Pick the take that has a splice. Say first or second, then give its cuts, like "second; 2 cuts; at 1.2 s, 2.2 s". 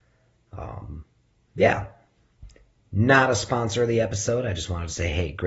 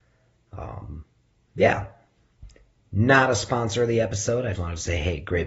second; 1 cut; at 4.5 s